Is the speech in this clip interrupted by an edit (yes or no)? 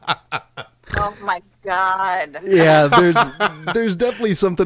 no